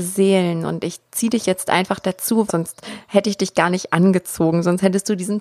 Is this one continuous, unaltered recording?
no; 1 cut; at 2.5 s

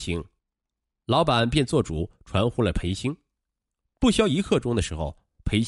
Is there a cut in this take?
no; 0 cuts

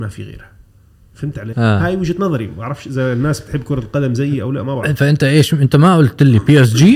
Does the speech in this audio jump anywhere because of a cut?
yes; 1 cut; at 1.5 s

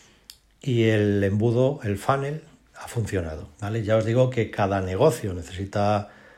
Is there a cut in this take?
yes; 1 cut; at 3.5 s

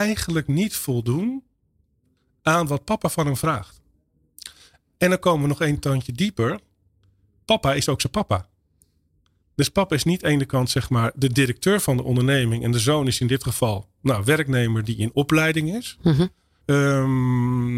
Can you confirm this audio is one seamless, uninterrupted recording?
no; 1 cut; at 16.6 s

